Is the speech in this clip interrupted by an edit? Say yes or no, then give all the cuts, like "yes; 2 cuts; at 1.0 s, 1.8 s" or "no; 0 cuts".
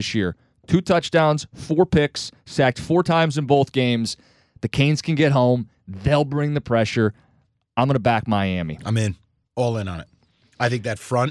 no; 0 cuts